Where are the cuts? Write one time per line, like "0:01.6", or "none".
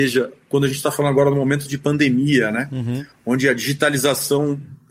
none